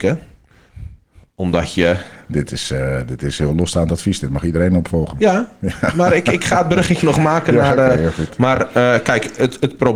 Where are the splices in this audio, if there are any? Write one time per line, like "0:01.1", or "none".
none